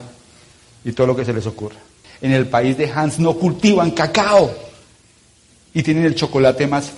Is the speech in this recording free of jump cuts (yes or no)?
no